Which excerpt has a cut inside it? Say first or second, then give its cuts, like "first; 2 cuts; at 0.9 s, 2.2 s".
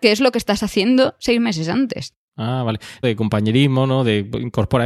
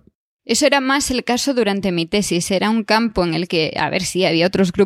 first; 1 cut; at 3.0 s